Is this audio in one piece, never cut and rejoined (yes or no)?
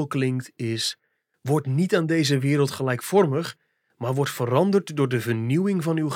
yes